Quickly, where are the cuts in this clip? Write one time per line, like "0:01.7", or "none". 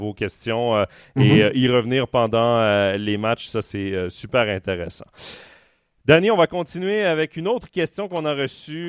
none